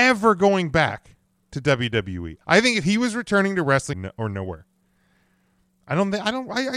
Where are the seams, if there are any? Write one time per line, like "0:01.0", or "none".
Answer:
0:02.4
0:03.9